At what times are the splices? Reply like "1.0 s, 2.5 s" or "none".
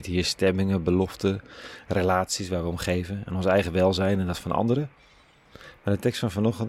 5.8 s